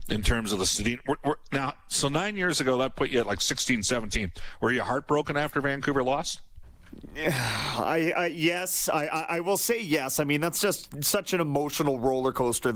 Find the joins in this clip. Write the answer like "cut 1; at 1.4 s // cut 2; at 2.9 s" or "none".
none